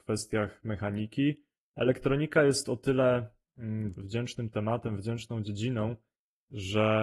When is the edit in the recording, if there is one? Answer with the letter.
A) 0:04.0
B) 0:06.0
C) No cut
A